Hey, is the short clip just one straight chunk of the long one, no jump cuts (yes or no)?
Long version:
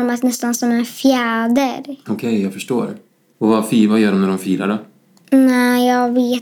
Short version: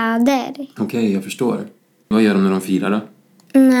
no